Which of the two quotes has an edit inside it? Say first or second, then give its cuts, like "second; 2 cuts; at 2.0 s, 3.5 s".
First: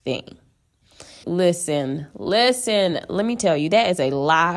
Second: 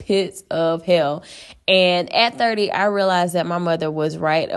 first; 1 cut; at 1.2 s